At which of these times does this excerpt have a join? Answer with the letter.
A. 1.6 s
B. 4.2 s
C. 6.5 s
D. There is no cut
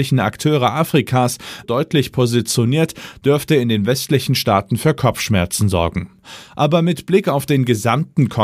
A